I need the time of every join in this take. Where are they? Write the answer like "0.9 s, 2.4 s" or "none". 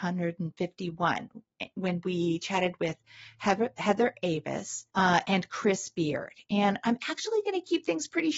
4.9 s

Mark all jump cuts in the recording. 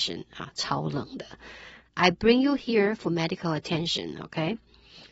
1.8 s

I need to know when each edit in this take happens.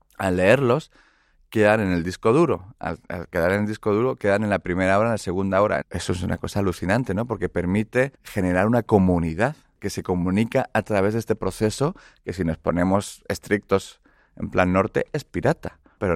5.8 s, 8.1 s

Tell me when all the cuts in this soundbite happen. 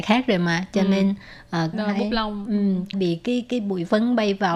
1.7 s, 2.9 s

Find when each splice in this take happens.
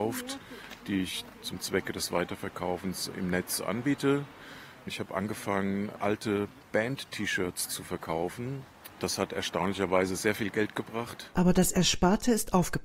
3.1 s

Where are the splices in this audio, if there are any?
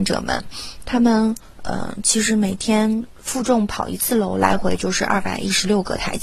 none

